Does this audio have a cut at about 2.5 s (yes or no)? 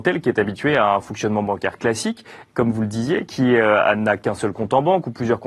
no